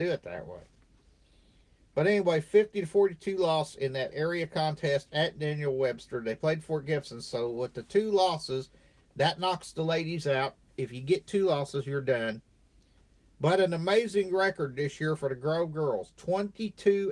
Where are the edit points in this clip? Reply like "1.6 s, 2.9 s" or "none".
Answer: none